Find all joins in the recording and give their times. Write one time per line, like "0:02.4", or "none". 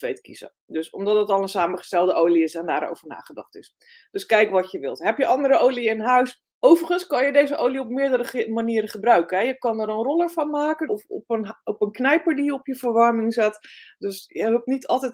0:06.5
0:10.9